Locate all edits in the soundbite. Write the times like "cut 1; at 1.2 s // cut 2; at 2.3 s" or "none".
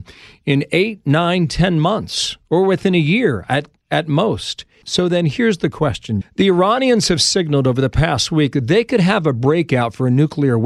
cut 1; at 4.8 s // cut 2; at 6.2 s